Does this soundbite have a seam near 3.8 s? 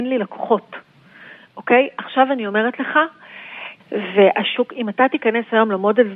yes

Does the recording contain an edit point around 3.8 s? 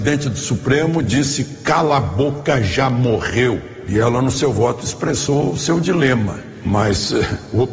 no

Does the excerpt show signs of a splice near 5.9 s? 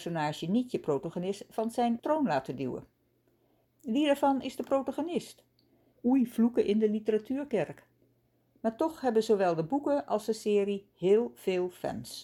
yes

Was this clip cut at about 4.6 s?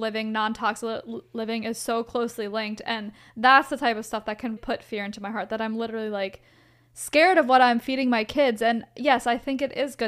yes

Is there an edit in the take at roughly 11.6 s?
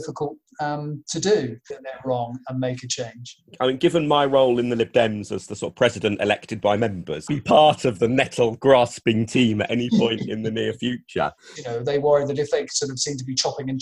yes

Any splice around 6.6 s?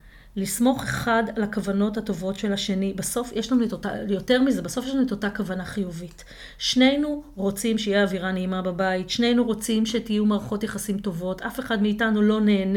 no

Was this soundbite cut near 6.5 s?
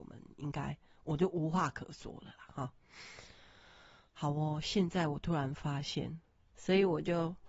yes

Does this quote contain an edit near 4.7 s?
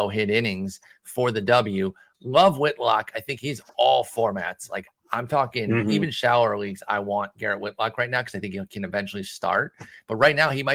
no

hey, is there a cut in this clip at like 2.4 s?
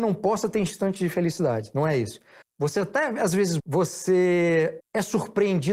yes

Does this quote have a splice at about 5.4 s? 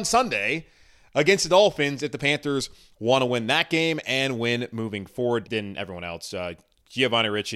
yes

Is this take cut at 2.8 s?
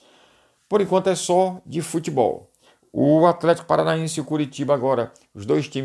yes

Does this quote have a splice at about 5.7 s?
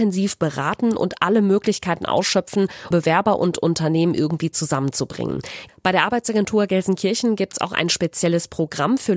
yes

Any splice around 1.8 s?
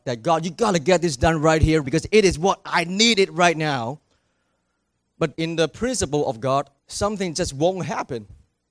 yes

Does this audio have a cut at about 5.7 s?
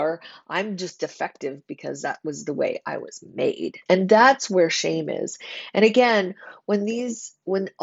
no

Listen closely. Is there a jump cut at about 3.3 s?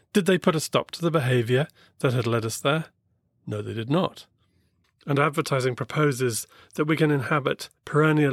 no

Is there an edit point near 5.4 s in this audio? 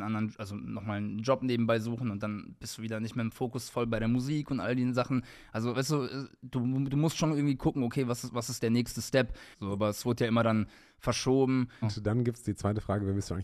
no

